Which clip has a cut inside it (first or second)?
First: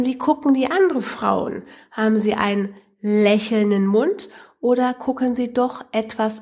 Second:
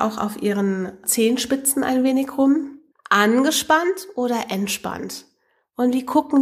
second